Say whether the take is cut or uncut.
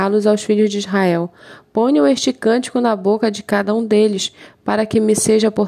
uncut